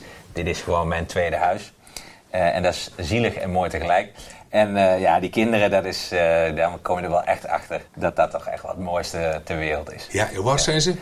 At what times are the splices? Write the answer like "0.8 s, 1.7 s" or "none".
7.9 s